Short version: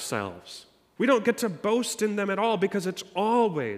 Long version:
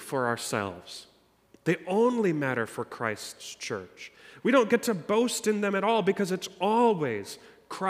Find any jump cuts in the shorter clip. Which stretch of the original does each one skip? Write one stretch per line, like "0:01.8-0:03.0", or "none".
0:01.4-0:04.4